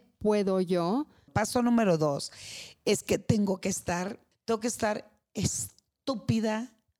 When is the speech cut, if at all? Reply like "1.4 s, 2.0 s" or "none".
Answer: 1.3 s, 4.3 s

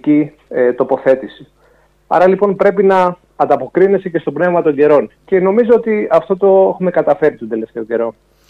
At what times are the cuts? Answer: 5.2 s

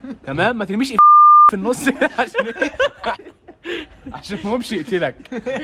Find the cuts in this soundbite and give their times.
3.1 s

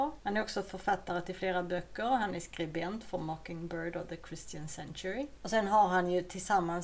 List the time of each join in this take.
none

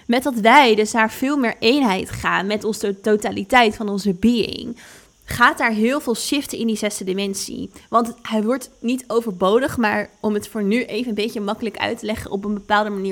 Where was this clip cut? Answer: none

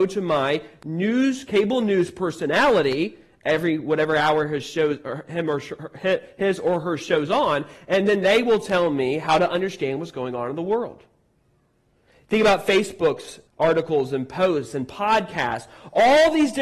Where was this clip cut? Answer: 13.5 s

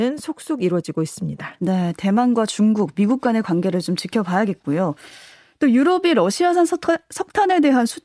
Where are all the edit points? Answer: none

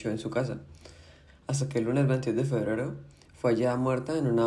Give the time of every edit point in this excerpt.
1.3 s

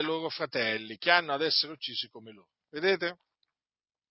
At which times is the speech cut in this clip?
none

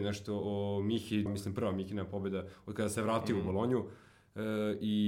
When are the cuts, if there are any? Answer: 1.3 s

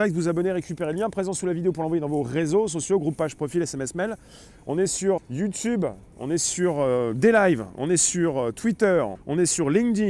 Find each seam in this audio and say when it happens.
5.2 s, 9.1 s

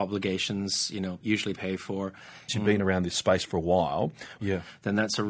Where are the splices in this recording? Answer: 1.2 s, 2.5 s, 4.4 s

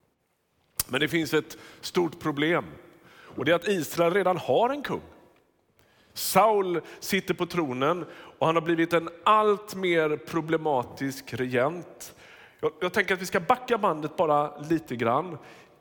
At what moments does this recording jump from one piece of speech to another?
none

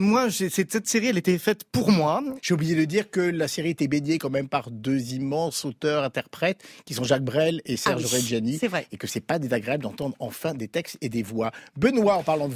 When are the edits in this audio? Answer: 2.4 s

